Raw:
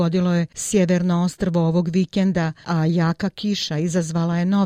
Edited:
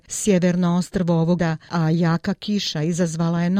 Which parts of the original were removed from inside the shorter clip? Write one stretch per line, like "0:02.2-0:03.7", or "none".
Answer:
0:01.8-0:02.3